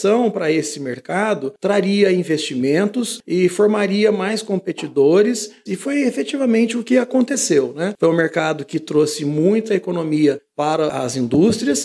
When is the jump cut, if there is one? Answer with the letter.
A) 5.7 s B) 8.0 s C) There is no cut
A